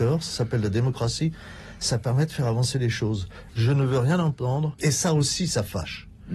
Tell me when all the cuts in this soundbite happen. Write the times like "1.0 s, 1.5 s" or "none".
3.5 s, 4.8 s